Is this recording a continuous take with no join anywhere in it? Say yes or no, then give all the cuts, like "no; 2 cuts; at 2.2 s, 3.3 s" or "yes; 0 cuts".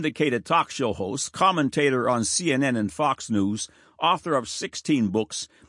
yes; 0 cuts